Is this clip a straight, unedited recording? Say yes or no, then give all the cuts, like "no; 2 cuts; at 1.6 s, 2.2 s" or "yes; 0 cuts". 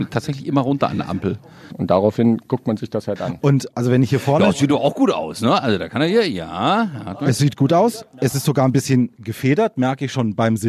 no; 1 cut; at 1.7 s